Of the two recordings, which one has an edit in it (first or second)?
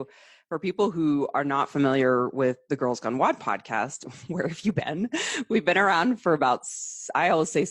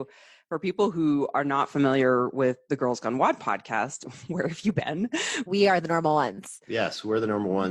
second